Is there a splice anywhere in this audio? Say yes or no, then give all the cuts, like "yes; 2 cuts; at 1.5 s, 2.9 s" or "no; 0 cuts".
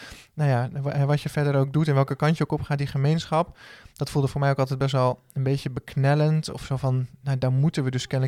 no; 0 cuts